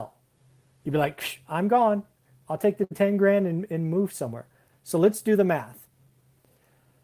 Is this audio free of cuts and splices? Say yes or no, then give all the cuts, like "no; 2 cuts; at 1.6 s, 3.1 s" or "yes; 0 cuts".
yes; 0 cuts